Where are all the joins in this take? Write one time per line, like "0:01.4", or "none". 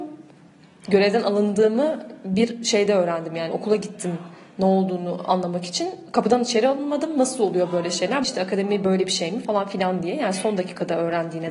0:08.2